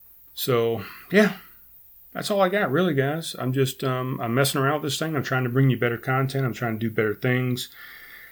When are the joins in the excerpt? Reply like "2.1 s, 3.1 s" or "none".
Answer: none

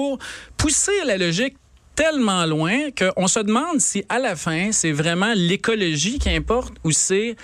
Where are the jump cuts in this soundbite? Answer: none

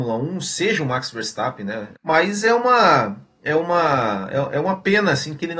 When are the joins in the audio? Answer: 1.9 s

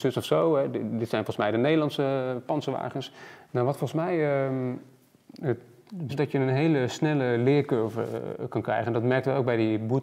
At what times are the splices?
3.5 s, 6.1 s

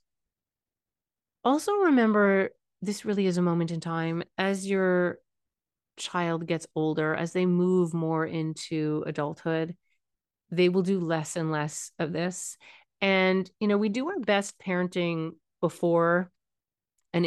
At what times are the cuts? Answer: none

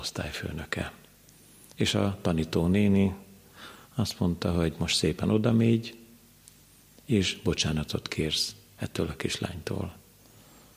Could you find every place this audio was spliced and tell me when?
1.7 s

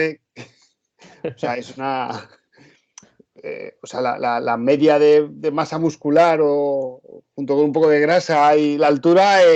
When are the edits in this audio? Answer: none

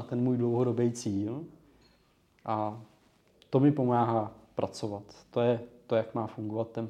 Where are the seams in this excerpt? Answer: none

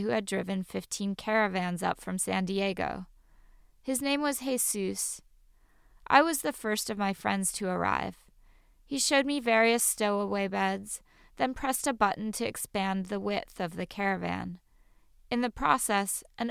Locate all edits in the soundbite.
none

